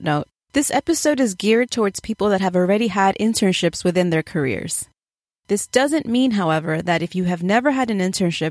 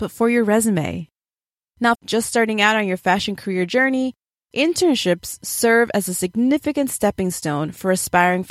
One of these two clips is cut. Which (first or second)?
second